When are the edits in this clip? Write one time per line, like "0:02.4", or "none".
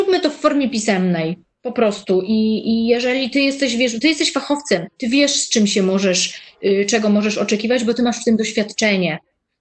none